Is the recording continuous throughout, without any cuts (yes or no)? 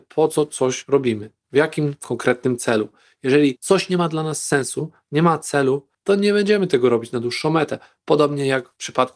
yes